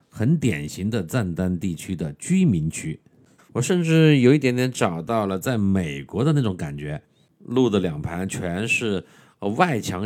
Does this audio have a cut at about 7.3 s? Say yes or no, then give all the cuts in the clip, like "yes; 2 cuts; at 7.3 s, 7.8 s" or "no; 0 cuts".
no; 1 cut; at 3.4 s